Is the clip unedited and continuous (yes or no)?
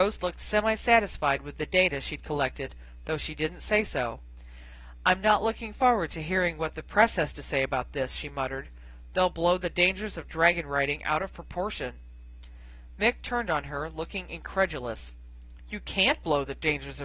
yes